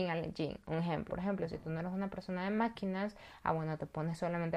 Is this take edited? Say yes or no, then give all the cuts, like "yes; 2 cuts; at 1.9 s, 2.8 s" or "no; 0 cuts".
yes; 1 cut; at 1.1 s